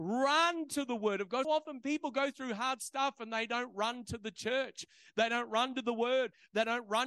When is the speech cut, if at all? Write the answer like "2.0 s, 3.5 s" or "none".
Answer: 1.4 s